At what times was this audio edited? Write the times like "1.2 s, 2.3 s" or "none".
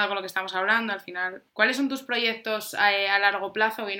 1.5 s